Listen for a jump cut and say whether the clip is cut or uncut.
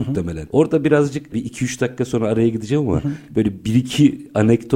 uncut